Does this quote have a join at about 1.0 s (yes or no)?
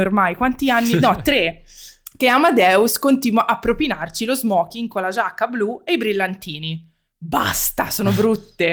no